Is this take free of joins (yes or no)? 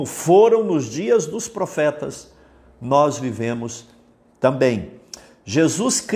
yes